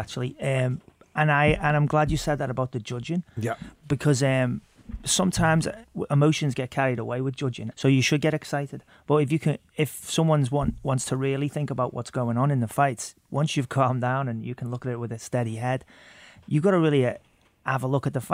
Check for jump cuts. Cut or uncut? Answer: cut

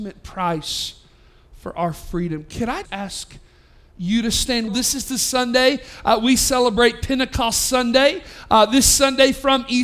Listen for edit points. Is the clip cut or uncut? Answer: cut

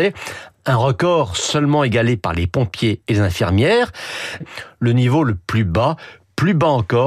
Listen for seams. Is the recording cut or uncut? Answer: cut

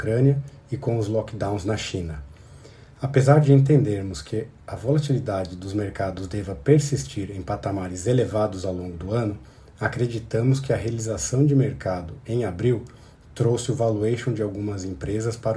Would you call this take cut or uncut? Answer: uncut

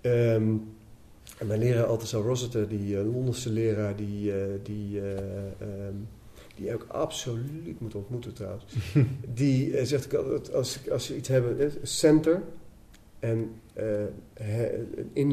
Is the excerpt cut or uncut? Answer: uncut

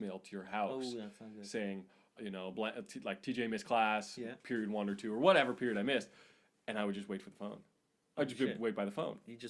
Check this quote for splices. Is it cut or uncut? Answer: cut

